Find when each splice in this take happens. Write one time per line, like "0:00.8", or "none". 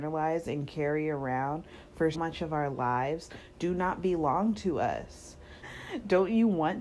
0:02.1
0:05.6